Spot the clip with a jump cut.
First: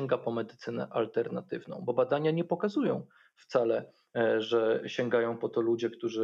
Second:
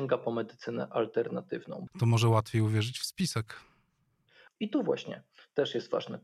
second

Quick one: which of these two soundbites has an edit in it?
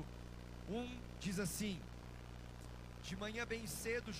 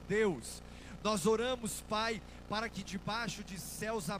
first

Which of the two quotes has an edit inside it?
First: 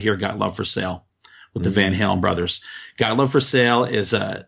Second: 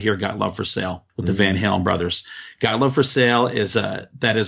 second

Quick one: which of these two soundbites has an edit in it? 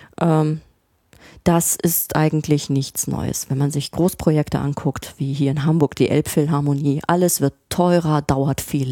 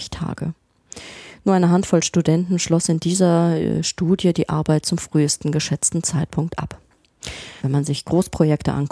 second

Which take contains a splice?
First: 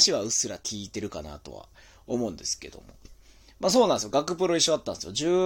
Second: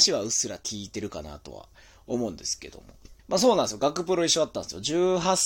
second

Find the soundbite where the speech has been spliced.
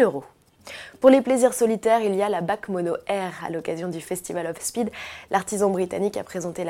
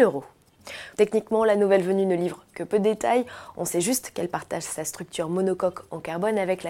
second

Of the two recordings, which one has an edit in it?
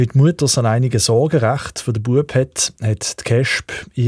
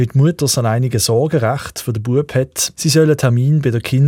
second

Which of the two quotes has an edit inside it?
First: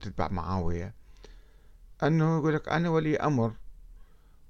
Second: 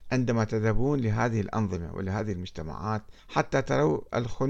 second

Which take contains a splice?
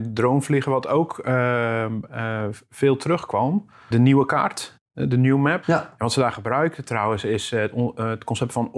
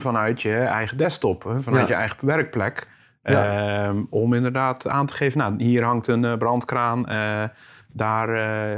first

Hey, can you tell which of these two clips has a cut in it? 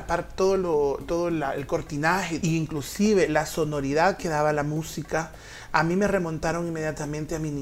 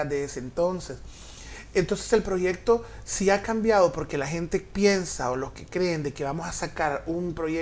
first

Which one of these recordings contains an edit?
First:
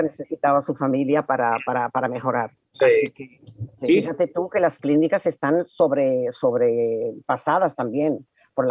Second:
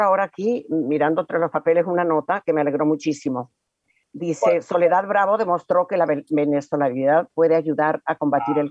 first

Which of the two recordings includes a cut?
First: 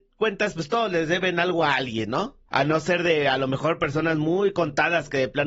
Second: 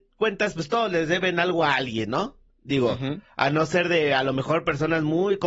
first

